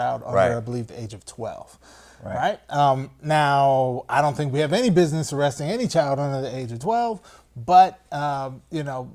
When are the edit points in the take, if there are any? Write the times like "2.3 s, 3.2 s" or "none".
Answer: none